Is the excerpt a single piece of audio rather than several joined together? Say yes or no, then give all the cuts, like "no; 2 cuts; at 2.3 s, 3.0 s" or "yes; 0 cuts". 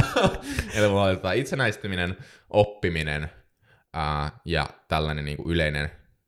yes; 0 cuts